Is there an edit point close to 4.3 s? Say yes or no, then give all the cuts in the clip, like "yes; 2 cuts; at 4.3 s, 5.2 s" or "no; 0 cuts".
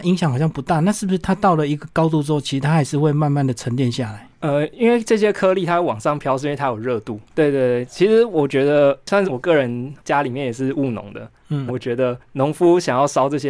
no; 3 cuts; at 7.3 s, 9.2 s, 11.7 s